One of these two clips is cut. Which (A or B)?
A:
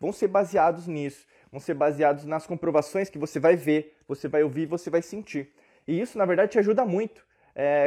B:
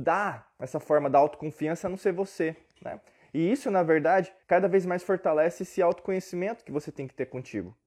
B